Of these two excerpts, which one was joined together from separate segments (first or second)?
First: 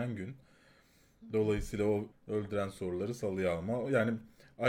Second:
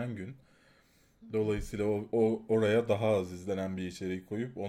first